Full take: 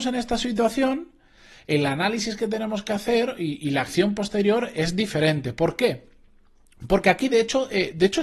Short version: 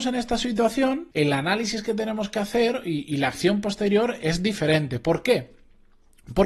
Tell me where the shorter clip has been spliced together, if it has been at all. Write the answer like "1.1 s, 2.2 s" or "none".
1.1 s